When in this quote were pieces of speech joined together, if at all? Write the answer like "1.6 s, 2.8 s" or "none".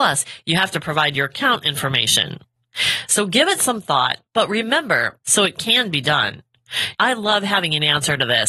5.2 s, 6.9 s